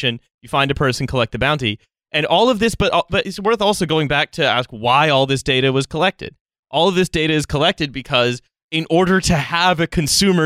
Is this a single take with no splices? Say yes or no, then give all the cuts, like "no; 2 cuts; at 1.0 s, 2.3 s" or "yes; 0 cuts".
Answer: yes; 0 cuts